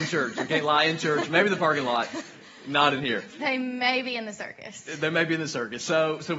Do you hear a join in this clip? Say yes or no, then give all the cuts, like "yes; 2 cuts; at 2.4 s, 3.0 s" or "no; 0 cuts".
no; 0 cuts